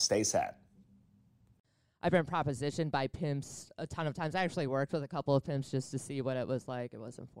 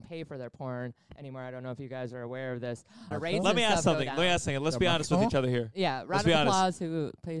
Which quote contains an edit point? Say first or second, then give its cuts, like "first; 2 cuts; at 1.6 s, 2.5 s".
second; 1 cut; at 3.1 s